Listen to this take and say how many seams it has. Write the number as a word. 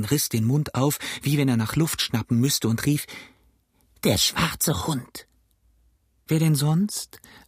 zero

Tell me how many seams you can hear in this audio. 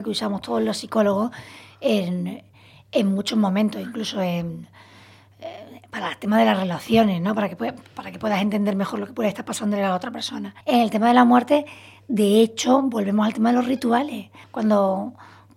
two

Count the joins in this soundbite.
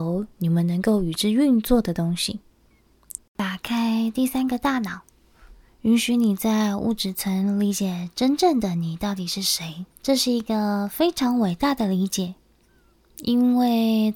two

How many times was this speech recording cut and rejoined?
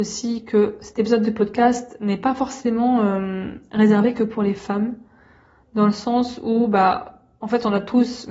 zero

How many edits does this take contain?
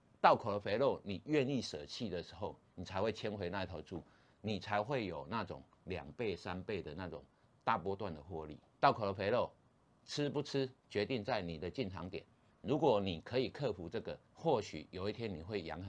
three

